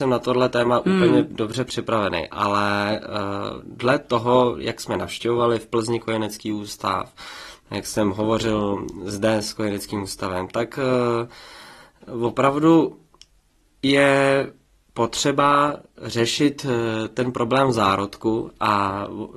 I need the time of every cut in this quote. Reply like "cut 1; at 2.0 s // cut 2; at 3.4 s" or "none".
none